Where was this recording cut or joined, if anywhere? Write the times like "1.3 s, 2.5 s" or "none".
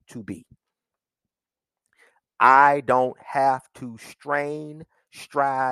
none